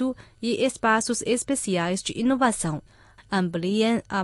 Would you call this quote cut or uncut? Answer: cut